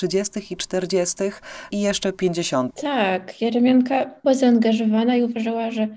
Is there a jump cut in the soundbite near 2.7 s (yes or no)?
yes